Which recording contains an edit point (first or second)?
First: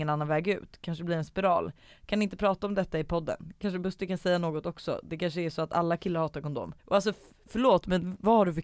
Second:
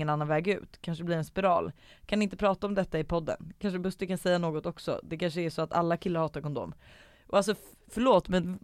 first